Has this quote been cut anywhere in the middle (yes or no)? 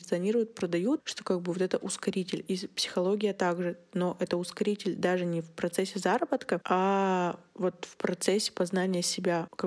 no